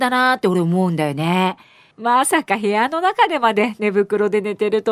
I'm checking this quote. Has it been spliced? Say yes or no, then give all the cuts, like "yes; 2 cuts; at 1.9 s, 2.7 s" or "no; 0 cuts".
yes; 1 cut; at 1.9 s